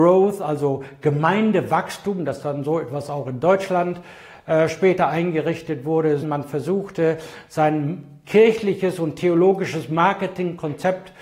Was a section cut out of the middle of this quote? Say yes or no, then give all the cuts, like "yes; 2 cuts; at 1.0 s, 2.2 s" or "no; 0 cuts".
yes; 1 cut; at 6.2 s